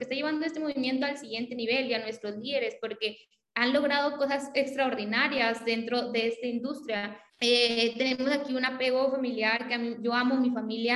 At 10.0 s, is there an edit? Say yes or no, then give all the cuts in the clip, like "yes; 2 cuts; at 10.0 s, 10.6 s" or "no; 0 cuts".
no; 1 cut; at 7.3 s